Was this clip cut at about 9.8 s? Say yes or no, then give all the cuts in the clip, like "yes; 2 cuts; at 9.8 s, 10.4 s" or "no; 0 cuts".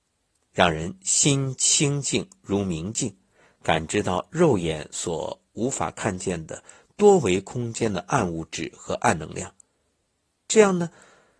no; 0 cuts